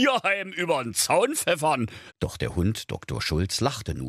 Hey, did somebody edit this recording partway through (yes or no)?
yes